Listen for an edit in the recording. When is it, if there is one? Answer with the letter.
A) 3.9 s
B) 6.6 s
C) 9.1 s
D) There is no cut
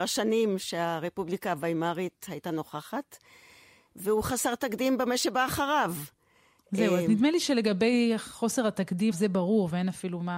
C